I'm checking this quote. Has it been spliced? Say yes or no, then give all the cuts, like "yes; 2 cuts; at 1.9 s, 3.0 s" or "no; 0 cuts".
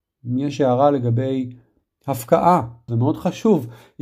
yes; 1 cut; at 2.9 s